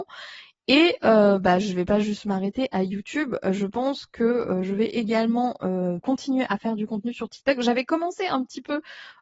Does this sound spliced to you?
yes; 1 cut; at 6.0 s

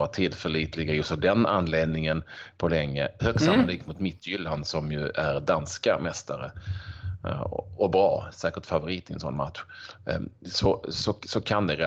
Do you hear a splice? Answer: yes; 2 cuts; at 3.2 s, 10.8 s

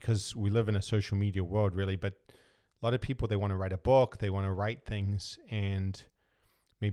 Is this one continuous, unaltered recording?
yes; 0 cuts

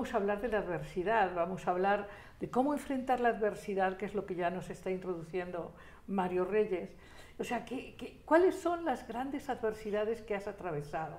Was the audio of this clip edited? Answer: no; 0 cuts

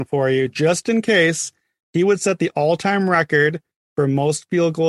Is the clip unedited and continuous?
no; 1 cut; at 1.8 s

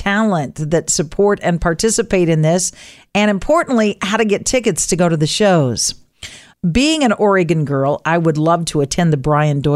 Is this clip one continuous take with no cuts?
yes; 0 cuts

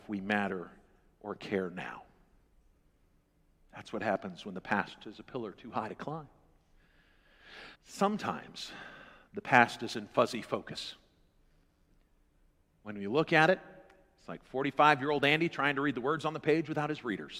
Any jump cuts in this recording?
yes; 1 cut; at 7.7 s

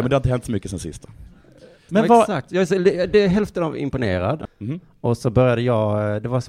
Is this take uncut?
no; 2 cuts; at 1.9 s, 4.5 s

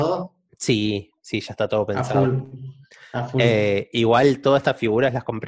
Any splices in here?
no; 0 cuts

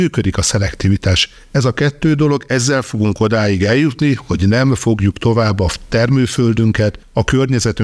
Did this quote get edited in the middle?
no; 0 cuts

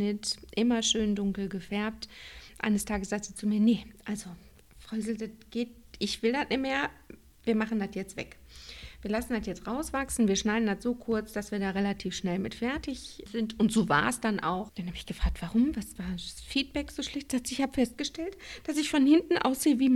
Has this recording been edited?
yes; 3 cuts; at 13.3 s, 14.7 s, 16.0 s

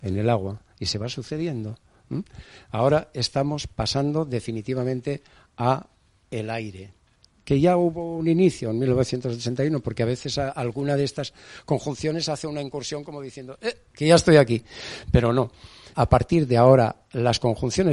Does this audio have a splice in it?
yes; 1 cut; at 15.9 s

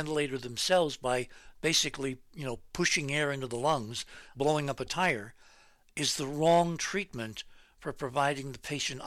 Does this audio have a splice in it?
yes; 1 cut; at 4.3 s

